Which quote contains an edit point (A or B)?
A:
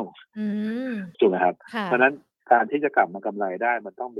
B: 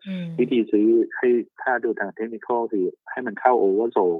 A